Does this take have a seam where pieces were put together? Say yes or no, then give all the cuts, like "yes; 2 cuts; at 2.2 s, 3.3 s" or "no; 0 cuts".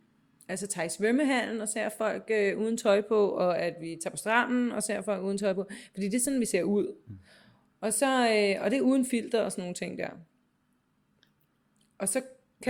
no; 0 cuts